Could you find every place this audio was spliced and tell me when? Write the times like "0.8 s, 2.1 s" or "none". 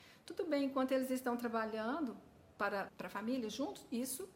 2.9 s